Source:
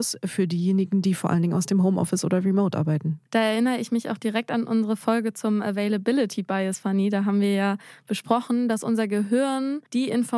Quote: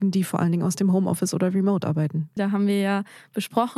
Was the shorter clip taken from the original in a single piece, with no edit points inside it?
no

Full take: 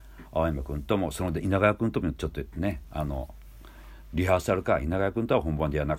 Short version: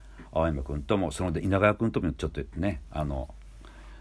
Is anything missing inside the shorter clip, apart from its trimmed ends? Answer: no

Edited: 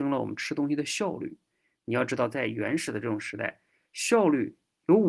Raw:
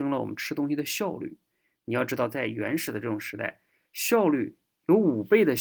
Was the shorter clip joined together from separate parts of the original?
no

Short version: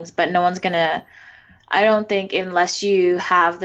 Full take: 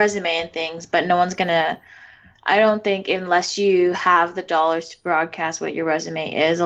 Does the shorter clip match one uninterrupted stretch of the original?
yes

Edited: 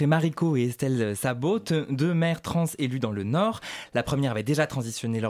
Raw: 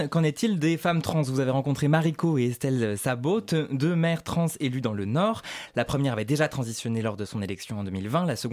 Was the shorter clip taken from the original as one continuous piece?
yes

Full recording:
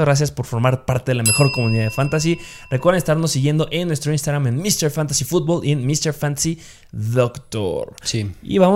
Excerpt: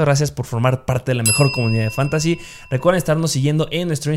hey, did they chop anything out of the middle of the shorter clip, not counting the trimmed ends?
no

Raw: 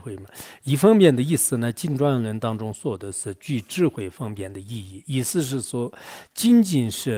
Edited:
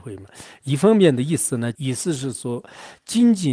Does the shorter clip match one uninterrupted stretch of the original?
no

